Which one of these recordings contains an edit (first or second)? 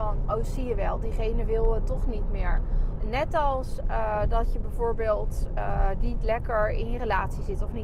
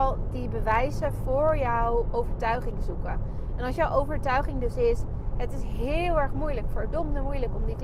first